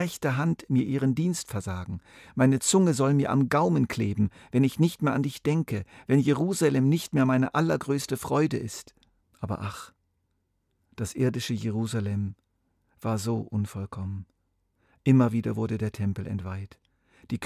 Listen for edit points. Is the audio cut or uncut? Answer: cut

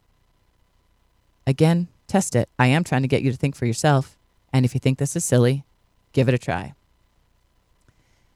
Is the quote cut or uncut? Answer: cut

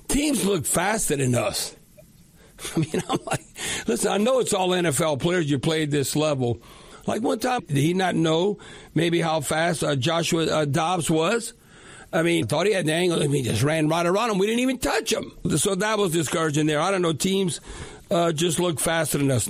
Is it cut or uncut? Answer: cut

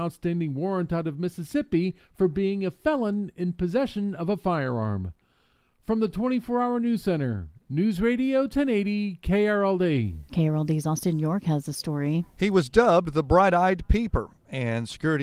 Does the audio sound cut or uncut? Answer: cut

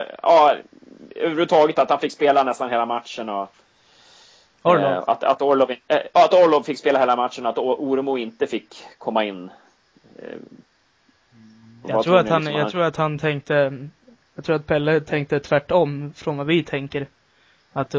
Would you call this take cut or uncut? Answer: uncut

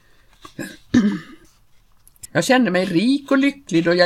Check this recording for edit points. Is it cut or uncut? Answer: cut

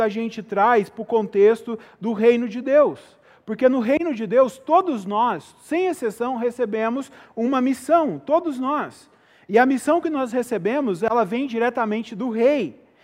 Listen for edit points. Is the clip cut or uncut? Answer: uncut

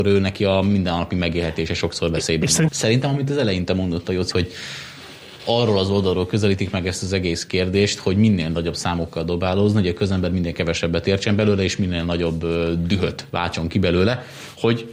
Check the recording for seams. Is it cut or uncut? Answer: cut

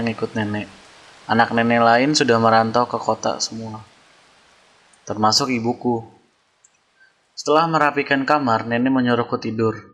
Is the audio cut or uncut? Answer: uncut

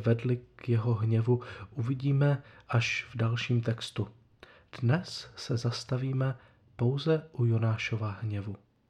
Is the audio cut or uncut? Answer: uncut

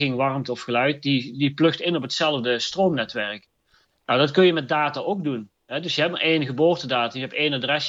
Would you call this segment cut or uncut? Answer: uncut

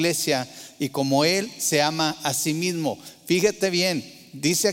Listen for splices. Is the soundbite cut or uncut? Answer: uncut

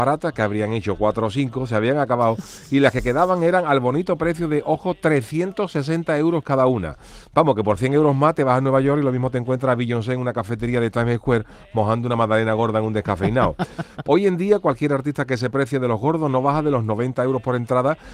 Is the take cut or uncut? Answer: cut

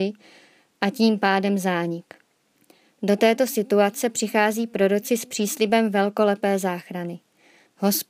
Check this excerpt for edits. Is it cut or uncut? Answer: uncut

